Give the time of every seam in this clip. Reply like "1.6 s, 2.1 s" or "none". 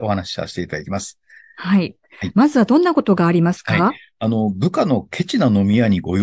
none